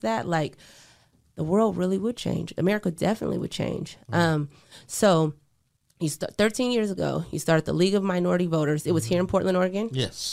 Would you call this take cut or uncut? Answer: uncut